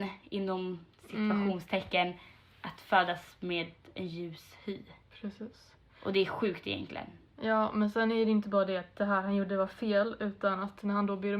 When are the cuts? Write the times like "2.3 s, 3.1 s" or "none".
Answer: 0.9 s